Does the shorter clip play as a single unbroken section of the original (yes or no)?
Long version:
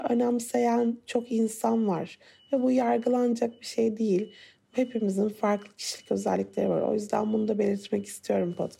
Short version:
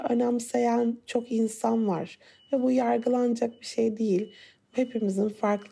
yes